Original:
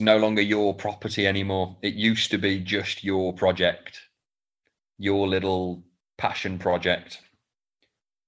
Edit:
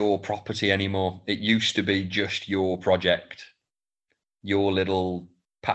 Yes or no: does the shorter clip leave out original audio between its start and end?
no